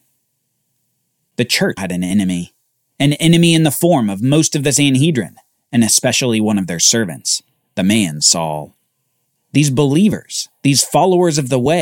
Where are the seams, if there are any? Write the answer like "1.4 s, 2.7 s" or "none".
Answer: 1.8 s